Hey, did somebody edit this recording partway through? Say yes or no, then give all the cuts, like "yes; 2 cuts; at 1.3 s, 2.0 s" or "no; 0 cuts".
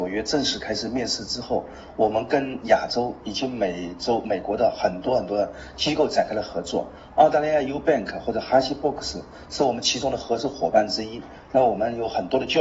no; 0 cuts